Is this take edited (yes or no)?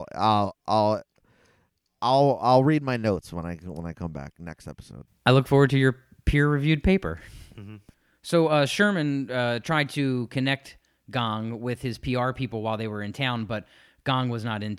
no